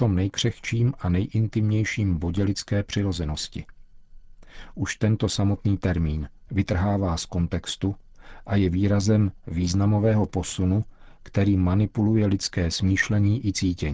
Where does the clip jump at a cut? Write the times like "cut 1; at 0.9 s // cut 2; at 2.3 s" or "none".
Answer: cut 1; at 6.5 s